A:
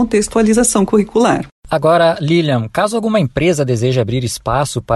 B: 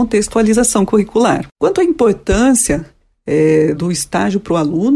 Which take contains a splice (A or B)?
B